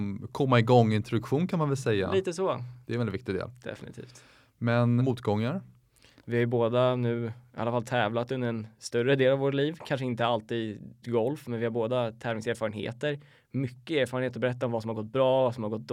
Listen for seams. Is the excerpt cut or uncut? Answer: cut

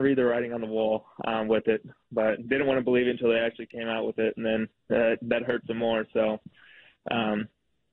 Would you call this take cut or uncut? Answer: uncut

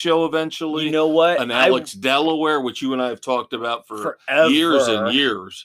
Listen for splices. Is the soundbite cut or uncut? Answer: uncut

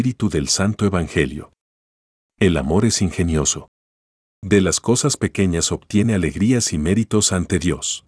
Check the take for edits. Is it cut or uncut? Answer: uncut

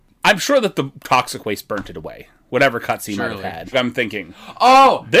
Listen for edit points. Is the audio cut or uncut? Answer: cut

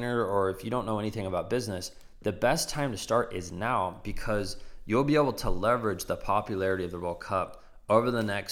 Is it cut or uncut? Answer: uncut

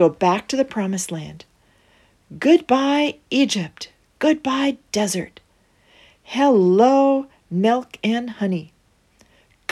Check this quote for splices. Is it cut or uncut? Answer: uncut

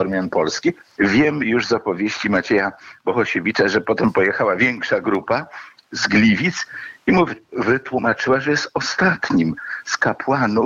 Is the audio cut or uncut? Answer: cut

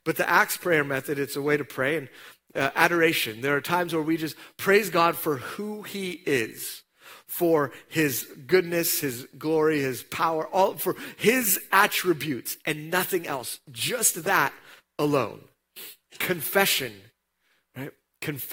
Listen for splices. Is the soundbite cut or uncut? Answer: uncut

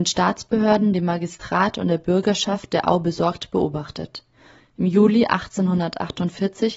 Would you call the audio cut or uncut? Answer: cut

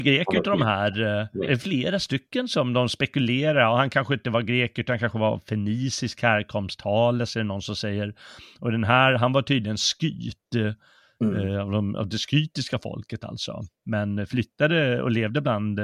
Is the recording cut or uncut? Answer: uncut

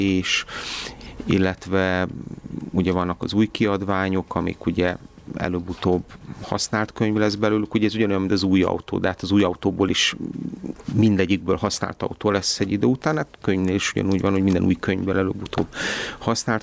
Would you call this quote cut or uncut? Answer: uncut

